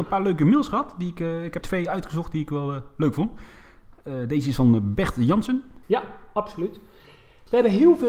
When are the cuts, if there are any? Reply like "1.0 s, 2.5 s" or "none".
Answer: 1.6 s, 5.8 s